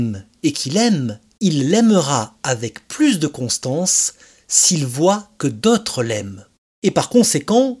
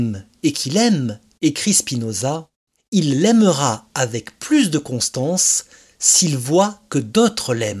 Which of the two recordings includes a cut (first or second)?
first